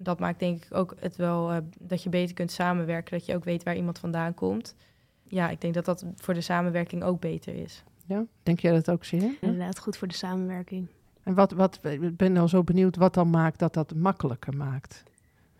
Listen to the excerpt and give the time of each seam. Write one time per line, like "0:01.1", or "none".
0:09.4